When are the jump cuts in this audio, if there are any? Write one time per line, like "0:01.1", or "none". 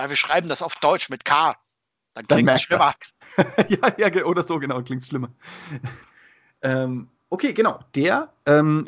0:03.1